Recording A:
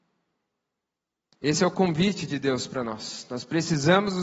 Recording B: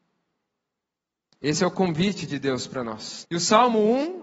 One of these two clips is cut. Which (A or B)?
B